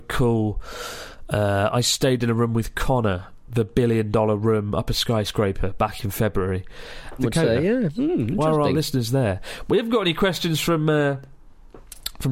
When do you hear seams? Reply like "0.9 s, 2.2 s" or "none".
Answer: 7.2 s